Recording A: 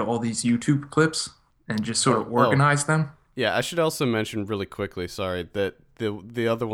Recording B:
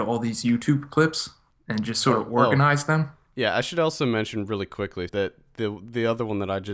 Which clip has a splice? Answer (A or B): B